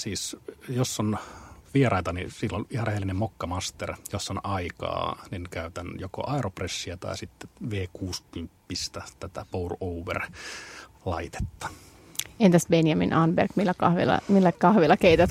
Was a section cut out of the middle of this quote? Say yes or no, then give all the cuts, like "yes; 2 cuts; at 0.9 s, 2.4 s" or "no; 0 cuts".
no; 0 cuts